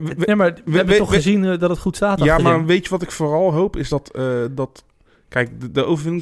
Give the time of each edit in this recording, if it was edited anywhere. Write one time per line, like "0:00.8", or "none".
none